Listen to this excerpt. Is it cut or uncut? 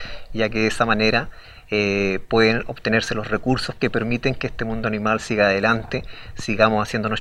uncut